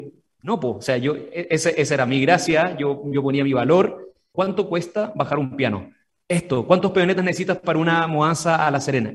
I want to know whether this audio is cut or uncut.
cut